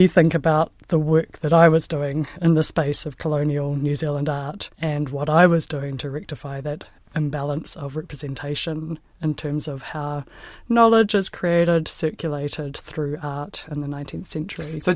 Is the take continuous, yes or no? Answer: no